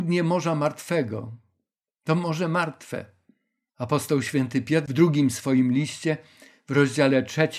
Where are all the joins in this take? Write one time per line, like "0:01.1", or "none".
0:03.7